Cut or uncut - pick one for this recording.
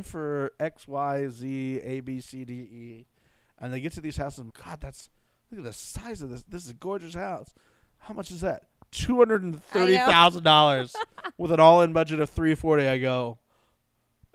cut